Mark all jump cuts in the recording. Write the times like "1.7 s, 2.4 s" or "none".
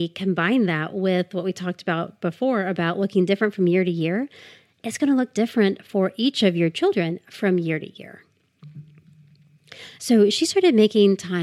10.0 s